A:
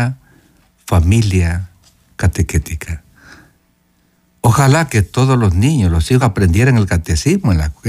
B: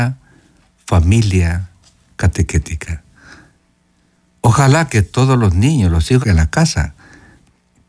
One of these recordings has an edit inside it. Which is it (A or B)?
B